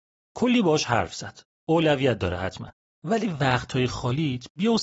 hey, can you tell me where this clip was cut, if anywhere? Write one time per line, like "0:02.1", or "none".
0:01.6